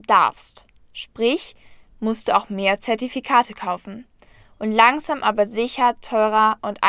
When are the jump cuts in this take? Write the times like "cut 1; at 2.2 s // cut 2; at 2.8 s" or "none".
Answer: cut 1; at 1.9 s

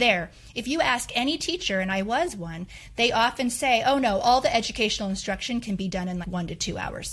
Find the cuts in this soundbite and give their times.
cut 1; at 6.2 s

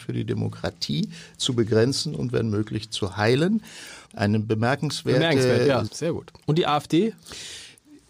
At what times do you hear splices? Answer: cut 1; at 4.1 s // cut 2; at 5.9 s

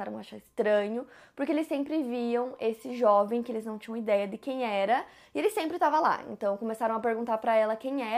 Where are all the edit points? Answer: none

